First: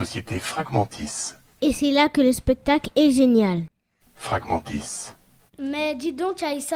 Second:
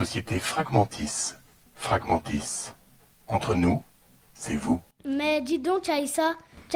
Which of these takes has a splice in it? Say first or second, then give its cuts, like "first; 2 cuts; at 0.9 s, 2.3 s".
first; 3 cuts; at 1.6 s, 4.0 s, 5.5 s